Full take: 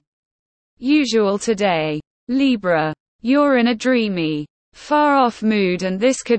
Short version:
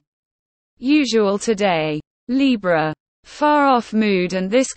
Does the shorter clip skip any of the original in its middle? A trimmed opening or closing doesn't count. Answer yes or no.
yes